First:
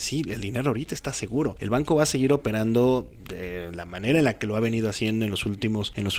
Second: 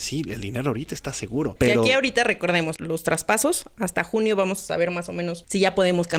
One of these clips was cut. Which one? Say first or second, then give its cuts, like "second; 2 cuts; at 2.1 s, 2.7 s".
second; 2 cuts; at 1.6 s, 2.8 s